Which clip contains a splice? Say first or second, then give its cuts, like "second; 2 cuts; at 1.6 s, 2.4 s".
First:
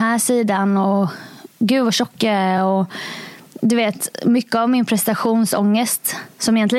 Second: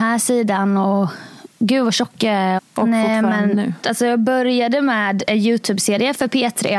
second; 2 cuts; at 2.6 s, 3.8 s